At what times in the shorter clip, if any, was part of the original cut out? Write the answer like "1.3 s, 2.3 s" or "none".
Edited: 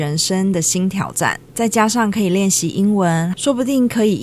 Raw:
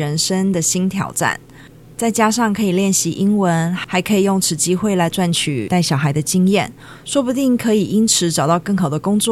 1.5 s, 3.3 s